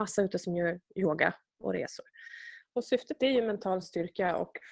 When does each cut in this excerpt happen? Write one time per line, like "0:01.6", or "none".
0:02.6